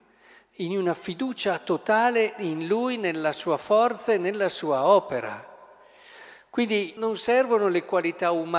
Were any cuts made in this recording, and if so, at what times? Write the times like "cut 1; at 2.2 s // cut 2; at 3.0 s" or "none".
cut 1; at 7.0 s